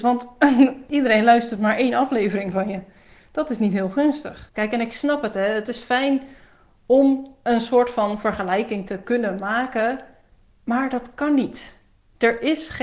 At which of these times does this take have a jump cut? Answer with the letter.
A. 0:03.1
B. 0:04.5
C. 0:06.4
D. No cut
B